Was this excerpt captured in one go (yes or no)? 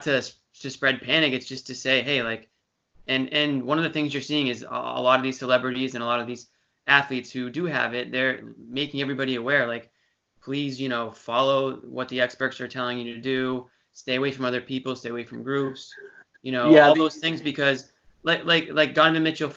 yes